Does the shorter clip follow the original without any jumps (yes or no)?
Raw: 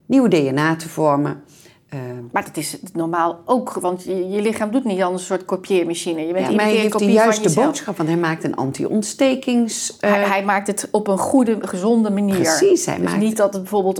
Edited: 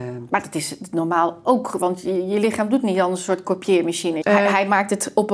no